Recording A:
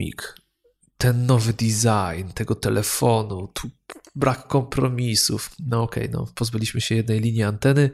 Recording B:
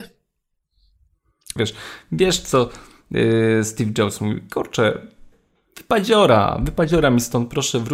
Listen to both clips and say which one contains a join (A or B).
B